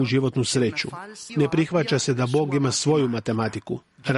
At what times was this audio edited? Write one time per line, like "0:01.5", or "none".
0:01.3